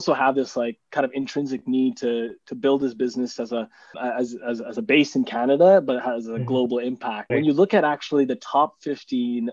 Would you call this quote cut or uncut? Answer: cut